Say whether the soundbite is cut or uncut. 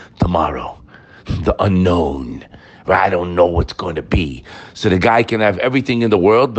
uncut